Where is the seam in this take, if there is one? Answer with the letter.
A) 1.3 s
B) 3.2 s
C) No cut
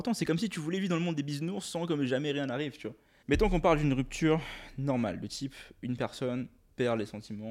B